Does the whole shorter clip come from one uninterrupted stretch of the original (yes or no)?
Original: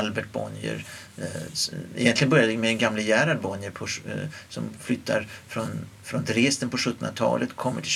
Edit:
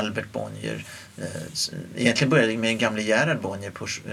yes